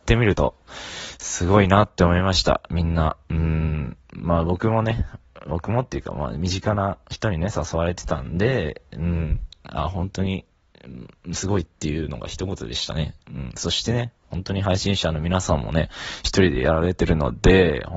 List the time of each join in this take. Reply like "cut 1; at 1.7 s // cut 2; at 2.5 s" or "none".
none